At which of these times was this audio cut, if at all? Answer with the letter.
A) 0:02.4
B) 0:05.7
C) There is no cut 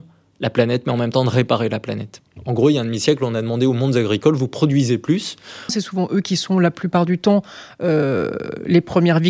B